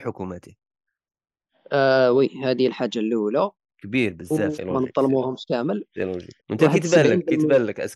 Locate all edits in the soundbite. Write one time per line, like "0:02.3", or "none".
0:04.6
0:06.4